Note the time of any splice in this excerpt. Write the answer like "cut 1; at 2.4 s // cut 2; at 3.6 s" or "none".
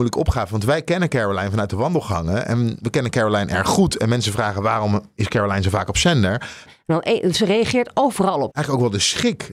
cut 1; at 6.7 s // cut 2; at 8.5 s